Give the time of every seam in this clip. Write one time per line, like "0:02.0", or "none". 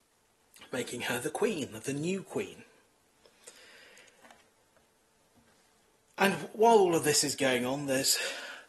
none

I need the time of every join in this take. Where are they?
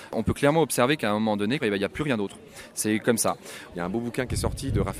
0:01.6
0:03.7

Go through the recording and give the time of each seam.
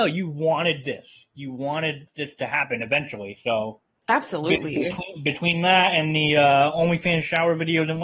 none

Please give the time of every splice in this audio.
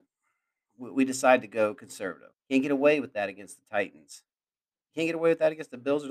0:02.3

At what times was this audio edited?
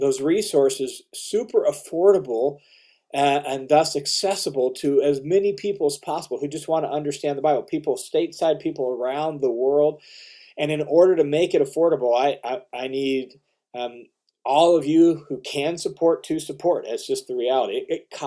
none

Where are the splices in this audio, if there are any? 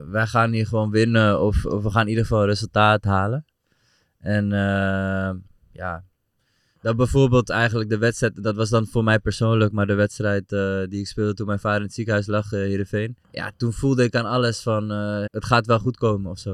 0:13.2
0:15.3

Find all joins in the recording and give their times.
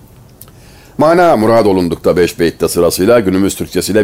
none

